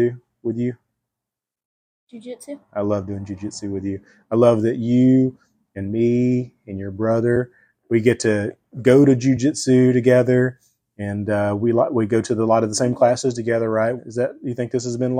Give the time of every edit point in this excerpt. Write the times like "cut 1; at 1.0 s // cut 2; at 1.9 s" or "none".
cut 1; at 14.0 s